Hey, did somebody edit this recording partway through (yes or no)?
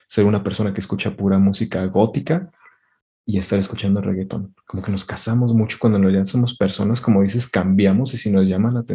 no